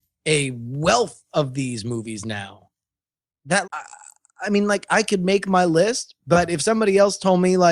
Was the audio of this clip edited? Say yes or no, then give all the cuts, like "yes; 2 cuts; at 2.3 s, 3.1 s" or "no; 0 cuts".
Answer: yes; 1 cut; at 3.6 s